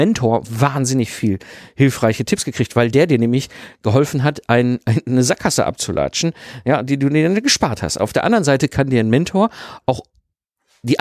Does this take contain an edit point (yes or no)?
no